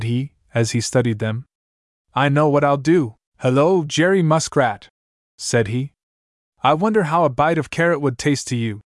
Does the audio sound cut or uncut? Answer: cut